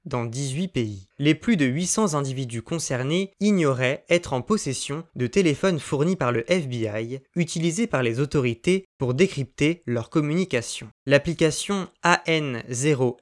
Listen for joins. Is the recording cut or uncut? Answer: uncut